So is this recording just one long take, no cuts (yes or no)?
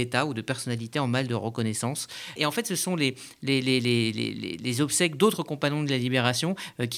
no